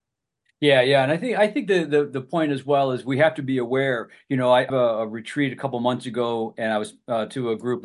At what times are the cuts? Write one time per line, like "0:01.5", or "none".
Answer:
0:04.7